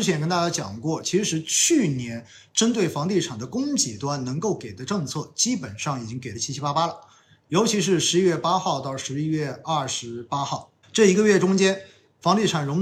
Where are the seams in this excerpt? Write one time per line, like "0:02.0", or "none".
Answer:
none